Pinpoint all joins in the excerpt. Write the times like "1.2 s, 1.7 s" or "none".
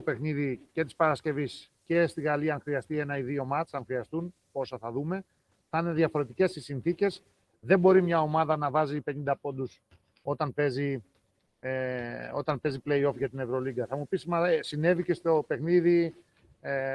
none